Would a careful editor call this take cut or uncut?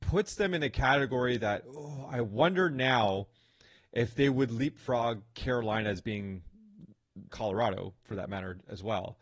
cut